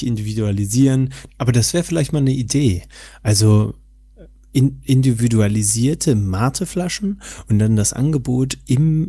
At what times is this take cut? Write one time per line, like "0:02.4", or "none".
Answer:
0:01.3